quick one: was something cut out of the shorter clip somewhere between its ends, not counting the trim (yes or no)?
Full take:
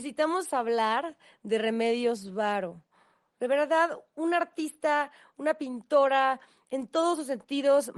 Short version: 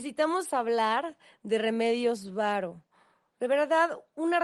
no